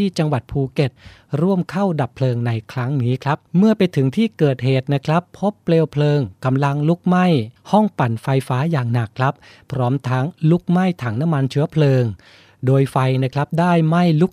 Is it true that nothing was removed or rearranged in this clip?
no; 1 cut; at 3.5 s

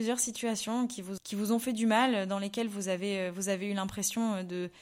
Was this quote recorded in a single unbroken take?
no; 1 cut; at 1.2 s

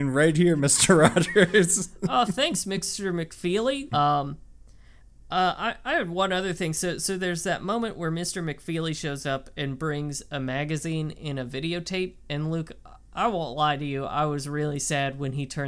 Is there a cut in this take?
yes; 1 cut; at 3.9 s

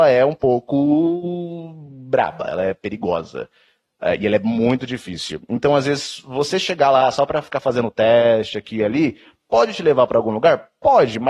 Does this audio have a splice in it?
no; 0 cuts

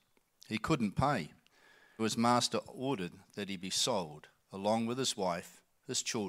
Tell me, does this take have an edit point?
yes; 1 cut; at 2.0 s

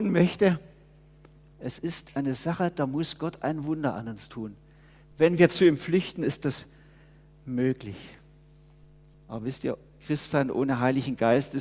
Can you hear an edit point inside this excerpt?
yes; 2 cuts; at 1.5 s, 9.1 s

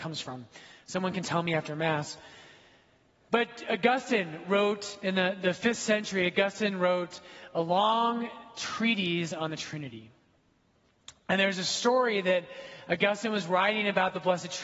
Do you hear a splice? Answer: no; 0 cuts

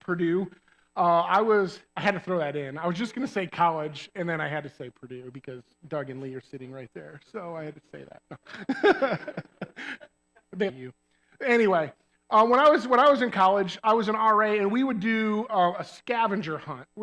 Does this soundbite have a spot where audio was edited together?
yes; 1 cut; at 10.7 s

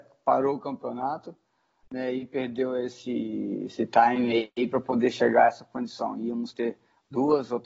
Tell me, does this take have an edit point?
no; 0 cuts

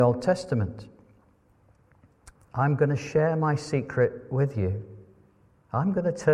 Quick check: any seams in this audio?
yes; 1 cut; at 2.4 s

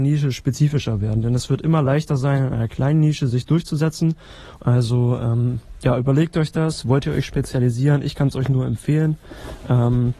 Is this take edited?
yes; 1 cut; at 4.6 s

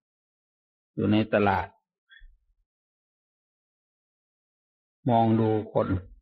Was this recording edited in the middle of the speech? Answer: no; 0 cuts

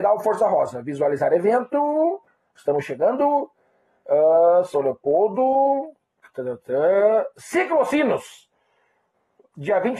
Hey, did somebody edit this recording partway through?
no; 0 cuts

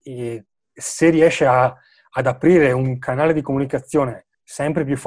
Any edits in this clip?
no; 0 cuts

